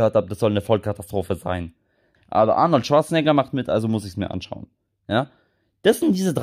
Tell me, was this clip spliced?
yes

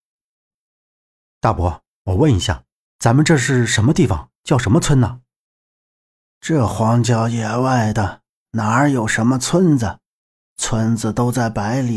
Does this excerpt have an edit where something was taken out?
no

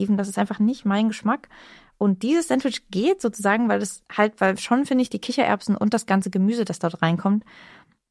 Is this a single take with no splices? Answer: no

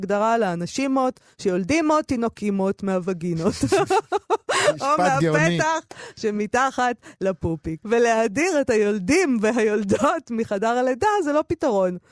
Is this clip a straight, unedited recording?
no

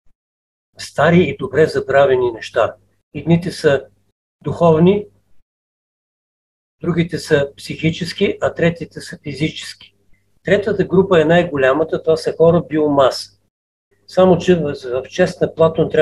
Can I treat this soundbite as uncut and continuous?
no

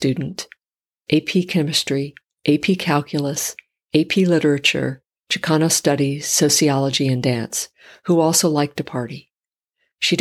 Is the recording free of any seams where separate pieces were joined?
yes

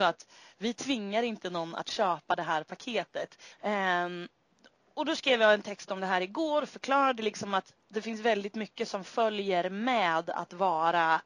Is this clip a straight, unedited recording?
no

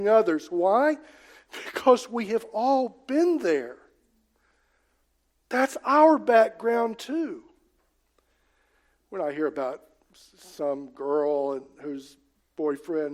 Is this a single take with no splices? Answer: yes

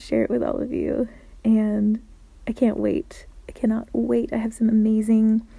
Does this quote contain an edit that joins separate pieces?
no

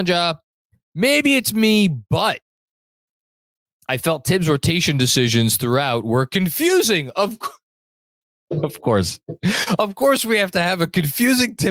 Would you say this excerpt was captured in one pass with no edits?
yes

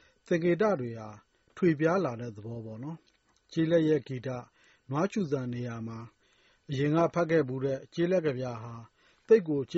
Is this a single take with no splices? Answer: no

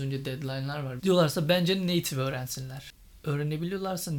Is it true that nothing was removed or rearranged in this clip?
no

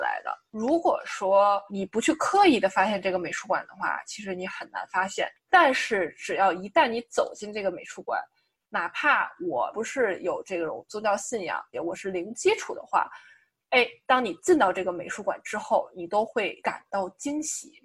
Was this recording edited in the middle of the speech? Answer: yes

